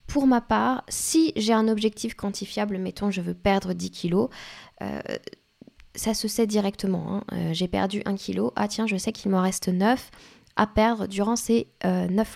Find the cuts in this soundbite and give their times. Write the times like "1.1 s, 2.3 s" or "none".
none